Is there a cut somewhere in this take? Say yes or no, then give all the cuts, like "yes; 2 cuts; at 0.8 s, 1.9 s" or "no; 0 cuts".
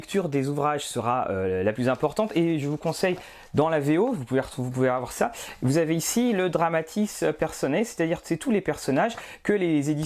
no; 0 cuts